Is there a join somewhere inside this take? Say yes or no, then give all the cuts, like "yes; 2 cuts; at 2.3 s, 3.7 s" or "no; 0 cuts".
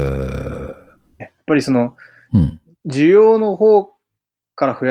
yes; 2 cuts; at 1.2 s, 2.8 s